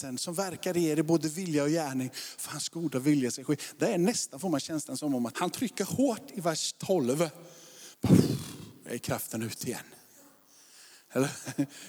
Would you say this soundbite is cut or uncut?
cut